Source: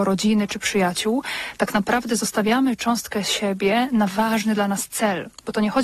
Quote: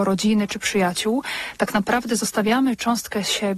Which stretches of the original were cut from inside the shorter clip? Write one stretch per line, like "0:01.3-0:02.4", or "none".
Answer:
none